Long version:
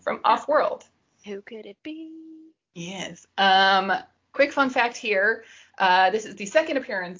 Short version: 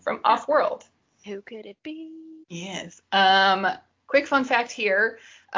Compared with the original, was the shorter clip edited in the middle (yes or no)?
yes